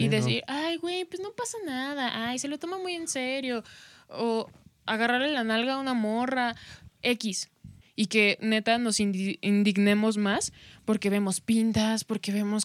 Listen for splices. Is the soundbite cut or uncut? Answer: cut